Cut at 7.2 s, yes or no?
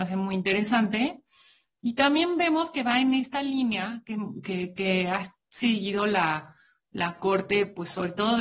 no